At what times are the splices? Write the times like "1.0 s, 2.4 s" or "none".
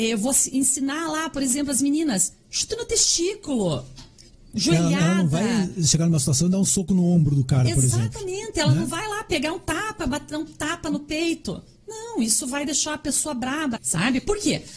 13.8 s